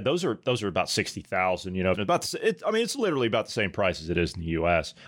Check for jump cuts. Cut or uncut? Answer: cut